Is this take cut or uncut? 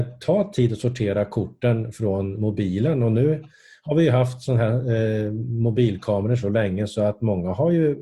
uncut